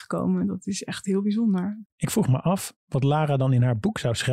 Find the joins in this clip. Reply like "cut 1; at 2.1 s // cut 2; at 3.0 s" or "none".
cut 1; at 1.9 s

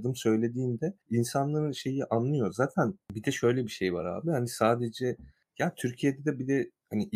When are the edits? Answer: cut 1; at 1.0 s

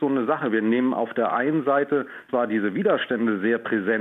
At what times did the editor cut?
none

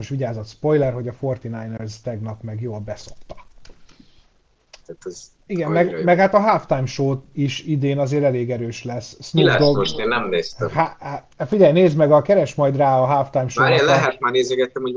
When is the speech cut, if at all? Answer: cut 1; at 4.8 s

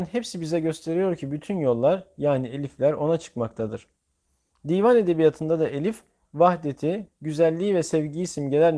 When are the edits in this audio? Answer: cut 1; at 7.1 s

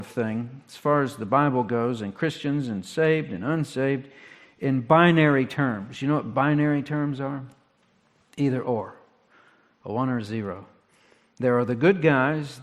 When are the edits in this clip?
none

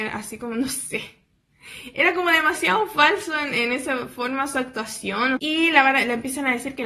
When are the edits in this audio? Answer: cut 1; at 5.4 s

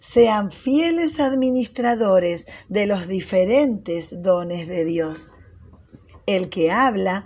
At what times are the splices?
none

